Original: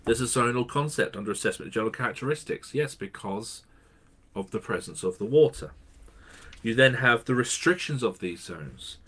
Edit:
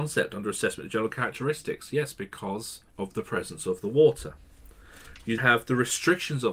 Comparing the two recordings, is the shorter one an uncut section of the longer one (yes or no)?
no